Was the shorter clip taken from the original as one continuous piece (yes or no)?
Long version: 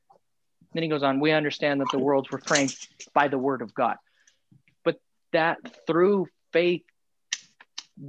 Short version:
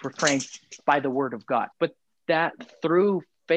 no